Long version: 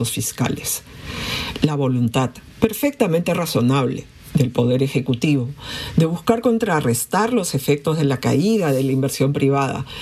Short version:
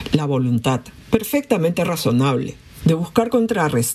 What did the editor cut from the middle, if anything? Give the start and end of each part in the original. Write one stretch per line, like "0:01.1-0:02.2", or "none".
0:04.3-0:05.9

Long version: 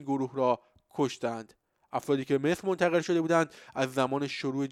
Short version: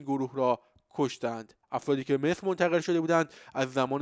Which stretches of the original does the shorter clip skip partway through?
0:01.6-0:01.8

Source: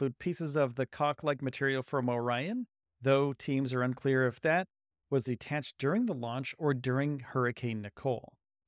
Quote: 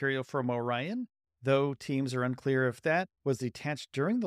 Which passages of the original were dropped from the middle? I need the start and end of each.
0:04.7-0:05.0

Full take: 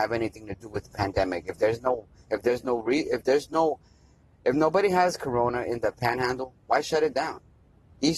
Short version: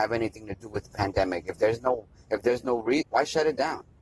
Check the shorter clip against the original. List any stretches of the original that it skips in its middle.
0:03.0-0:06.6

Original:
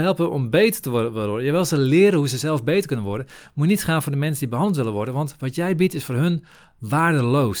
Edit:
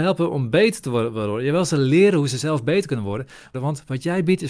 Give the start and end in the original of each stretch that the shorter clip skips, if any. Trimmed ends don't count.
0:03.5-0:05.1

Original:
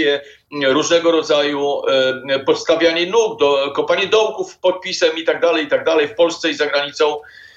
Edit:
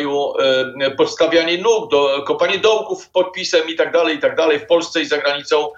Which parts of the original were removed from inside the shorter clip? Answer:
none

